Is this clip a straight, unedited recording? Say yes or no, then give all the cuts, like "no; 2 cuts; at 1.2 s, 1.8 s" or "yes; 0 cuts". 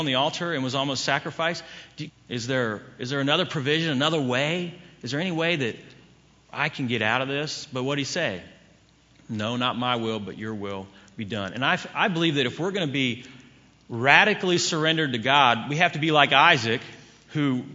no; 1 cut; at 2.1 s